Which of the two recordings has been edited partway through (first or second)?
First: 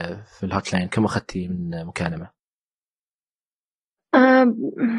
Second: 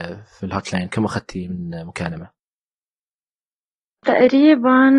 second